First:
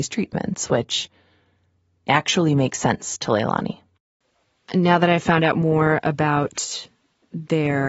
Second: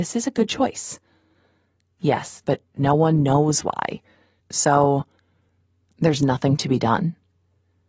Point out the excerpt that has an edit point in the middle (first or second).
second